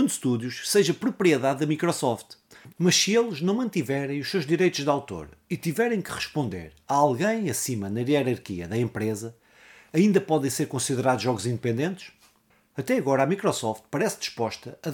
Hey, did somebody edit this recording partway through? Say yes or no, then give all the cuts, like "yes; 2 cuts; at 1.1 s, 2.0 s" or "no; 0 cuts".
yes; 1 cut; at 2.7 s